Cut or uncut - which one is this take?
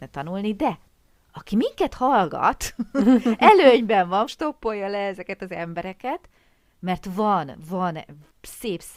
cut